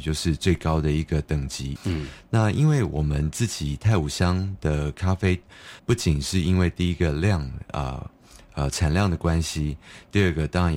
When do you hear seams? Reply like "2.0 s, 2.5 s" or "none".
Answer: 1.8 s, 5.8 s

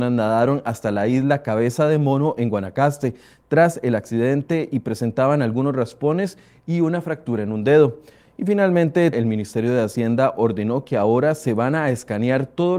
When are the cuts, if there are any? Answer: 9.1 s

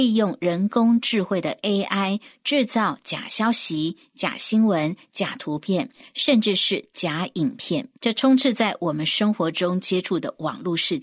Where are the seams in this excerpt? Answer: 8.0 s

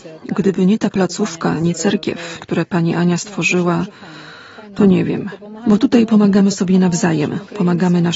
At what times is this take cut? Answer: 2.4 s

